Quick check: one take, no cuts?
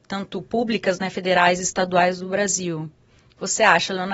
yes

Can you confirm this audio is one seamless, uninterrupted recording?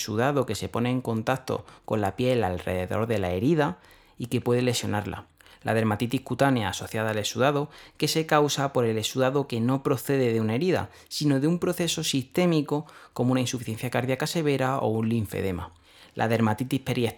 yes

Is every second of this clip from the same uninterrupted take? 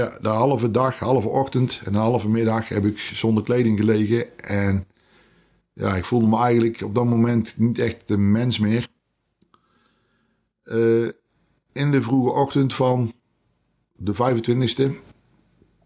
yes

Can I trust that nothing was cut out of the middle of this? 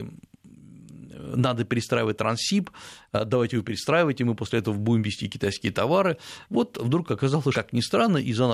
no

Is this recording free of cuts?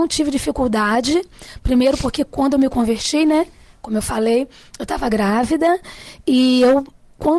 yes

